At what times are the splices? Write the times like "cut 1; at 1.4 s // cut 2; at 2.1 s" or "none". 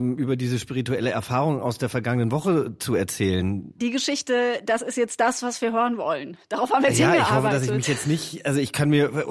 cut 1; at 3.8 s